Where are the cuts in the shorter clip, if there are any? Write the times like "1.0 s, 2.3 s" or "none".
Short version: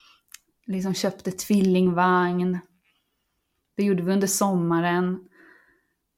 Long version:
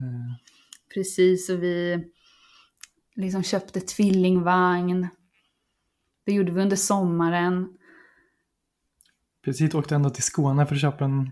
none